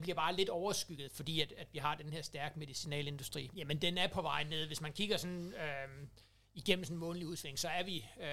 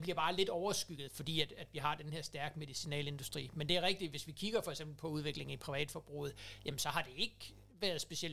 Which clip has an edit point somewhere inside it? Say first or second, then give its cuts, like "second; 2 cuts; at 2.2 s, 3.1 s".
first; 1 cut; at 3.5 s